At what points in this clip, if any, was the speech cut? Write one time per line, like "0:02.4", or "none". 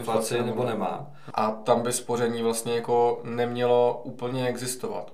0:01.3